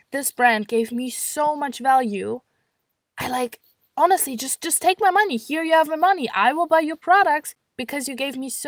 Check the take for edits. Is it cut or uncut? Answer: uncut